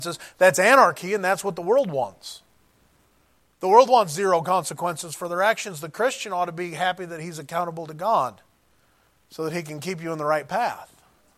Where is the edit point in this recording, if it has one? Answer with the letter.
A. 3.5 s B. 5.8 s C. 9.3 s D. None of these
D